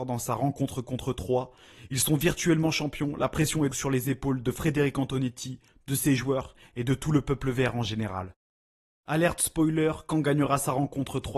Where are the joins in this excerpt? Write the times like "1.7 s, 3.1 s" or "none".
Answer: 3.7 s